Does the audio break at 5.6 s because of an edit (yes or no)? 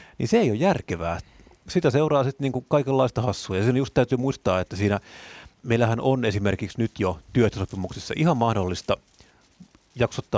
yes